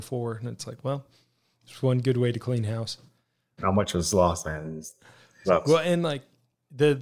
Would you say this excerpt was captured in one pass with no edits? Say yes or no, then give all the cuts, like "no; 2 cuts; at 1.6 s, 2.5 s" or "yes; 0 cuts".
no; 2 cuts; at 3.6 s, 5.4 s